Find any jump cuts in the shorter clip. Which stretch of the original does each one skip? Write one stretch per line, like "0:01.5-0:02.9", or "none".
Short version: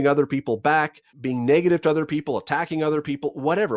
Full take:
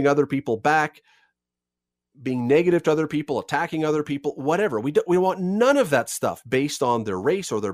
0:01.1-0:02.1